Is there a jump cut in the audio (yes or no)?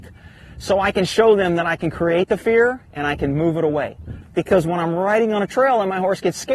yes